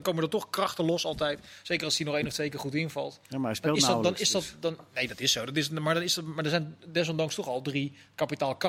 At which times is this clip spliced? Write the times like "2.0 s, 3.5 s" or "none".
none